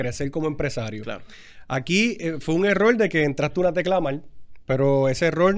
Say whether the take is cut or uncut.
uncut